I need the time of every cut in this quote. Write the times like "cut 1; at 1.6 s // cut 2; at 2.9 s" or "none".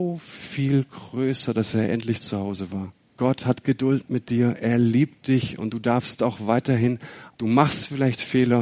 cut 1; at 3.1 s // cut 2; at 7.3 s